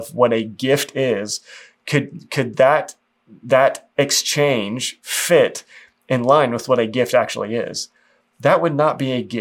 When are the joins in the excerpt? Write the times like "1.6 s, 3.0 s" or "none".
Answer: none